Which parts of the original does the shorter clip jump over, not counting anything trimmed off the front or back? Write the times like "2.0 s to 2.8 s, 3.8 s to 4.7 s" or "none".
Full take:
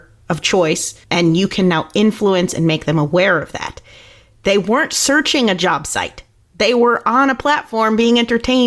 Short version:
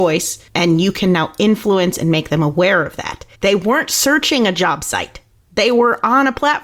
3.9 s to 4.4 s